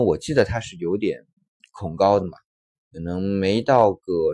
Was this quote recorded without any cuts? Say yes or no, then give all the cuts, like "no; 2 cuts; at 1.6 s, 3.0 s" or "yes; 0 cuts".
no; 1 cut; at 2.7 s